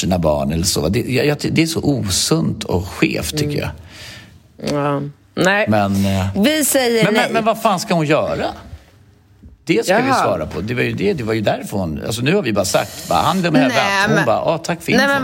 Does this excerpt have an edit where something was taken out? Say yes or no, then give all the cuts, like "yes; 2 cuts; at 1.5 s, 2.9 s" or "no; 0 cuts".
no; 0 cuts